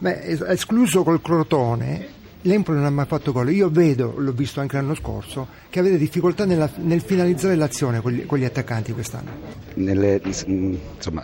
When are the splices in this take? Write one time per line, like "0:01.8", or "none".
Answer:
0:02.3